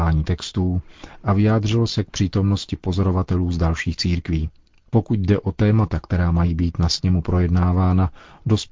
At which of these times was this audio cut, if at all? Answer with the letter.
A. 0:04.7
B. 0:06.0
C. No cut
C